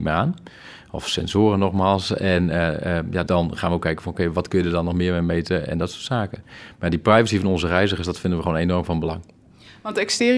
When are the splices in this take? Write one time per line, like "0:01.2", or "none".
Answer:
0:03.3